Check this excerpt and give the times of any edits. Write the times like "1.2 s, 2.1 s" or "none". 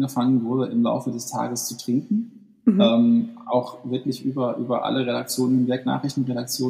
none